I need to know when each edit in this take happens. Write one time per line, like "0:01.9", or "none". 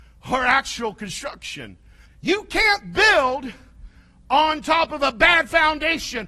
0:02.1